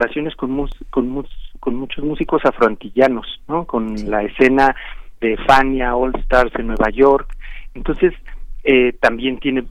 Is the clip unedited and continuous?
yes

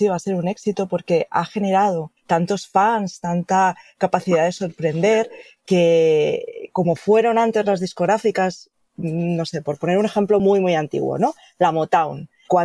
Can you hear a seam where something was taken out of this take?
no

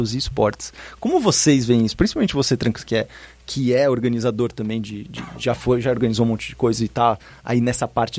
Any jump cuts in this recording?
no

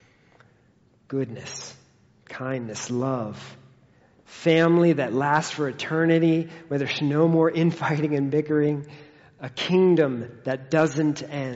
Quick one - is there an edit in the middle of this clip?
no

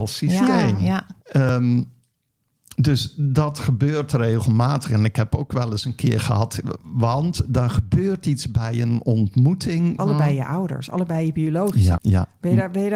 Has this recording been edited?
yes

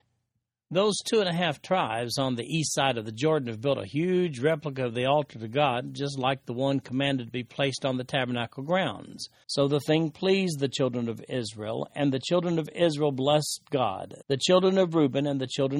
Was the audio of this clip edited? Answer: yes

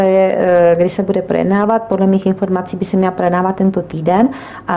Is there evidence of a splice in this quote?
no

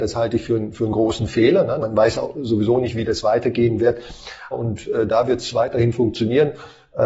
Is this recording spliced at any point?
yes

